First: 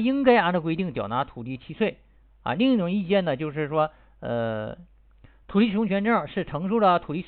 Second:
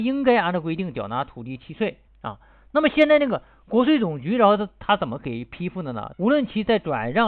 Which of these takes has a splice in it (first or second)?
second